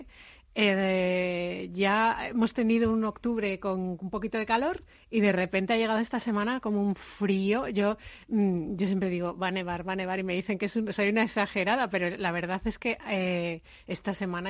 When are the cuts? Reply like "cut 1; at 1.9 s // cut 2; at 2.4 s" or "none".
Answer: none